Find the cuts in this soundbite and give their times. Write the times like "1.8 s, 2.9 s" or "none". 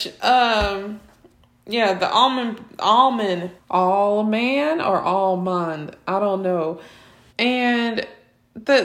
3.6 s, 7.3 s